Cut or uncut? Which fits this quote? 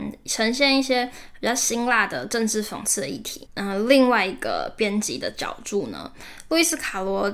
cut